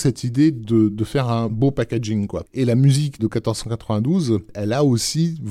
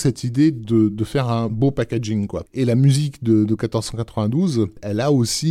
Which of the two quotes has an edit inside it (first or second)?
first